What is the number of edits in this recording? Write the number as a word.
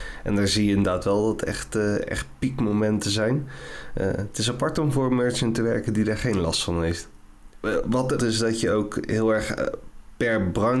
one